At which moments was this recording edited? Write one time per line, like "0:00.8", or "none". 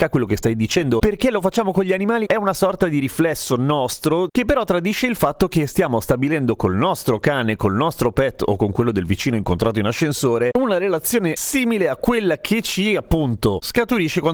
0:01.0
0:02.2